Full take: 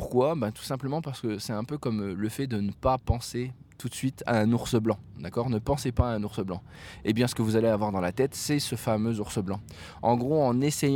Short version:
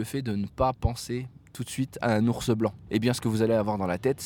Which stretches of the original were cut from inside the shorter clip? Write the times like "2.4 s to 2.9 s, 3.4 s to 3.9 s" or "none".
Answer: 5.1 s to 7.0 s